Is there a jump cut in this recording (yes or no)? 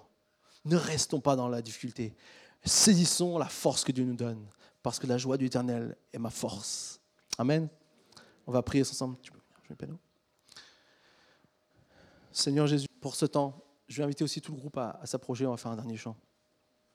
yes